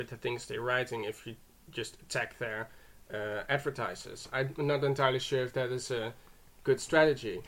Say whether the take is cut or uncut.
uncut